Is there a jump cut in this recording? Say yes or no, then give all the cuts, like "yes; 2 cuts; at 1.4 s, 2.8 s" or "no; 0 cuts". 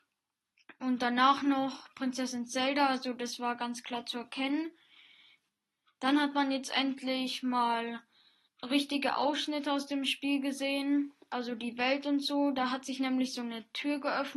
no; 0 cuts